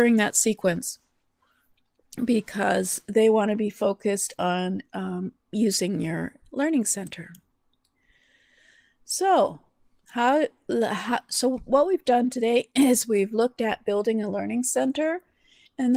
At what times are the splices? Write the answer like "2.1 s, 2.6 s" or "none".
none